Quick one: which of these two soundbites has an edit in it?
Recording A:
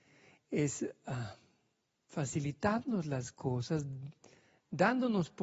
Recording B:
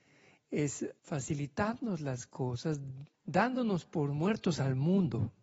B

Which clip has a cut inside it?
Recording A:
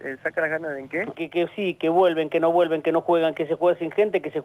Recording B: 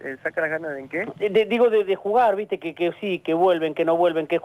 A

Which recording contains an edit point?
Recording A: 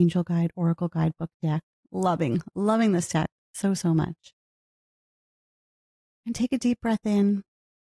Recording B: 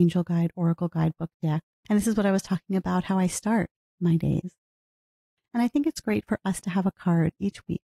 B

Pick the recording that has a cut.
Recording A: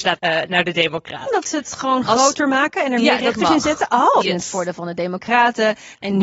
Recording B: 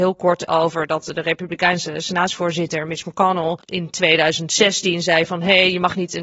A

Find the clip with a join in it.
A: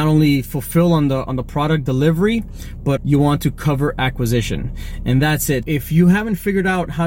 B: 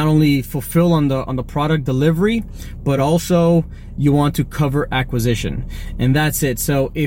A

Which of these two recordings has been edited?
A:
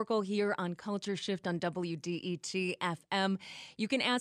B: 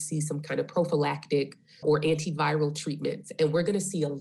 B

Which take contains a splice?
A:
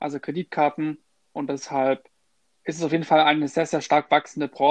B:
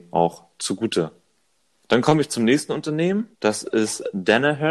B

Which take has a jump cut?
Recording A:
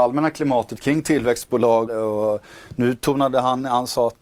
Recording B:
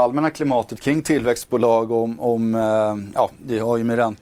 A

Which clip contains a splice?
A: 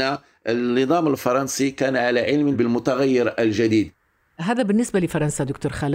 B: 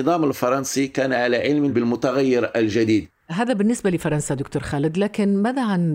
B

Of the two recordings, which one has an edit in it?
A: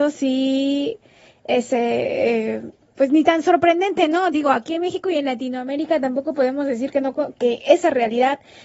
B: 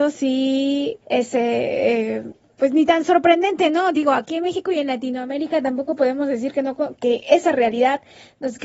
B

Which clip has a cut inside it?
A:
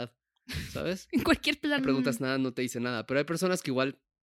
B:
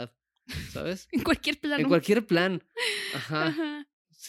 A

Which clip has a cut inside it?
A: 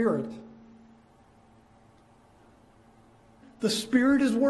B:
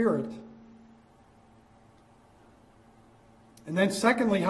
A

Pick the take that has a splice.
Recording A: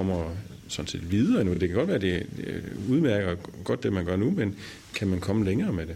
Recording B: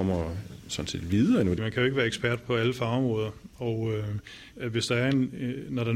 B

